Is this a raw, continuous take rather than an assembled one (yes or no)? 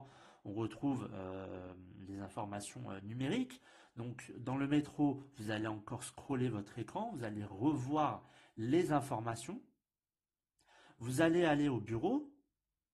yes